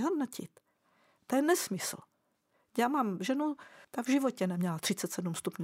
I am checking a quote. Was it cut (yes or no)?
yes